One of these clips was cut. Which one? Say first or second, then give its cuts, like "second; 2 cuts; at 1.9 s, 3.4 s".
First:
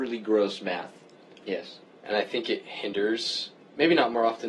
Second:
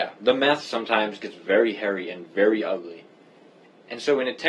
first; 1 cut; at 1.4 s